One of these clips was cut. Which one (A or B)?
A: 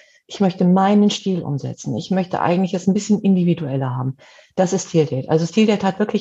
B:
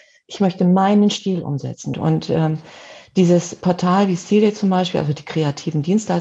B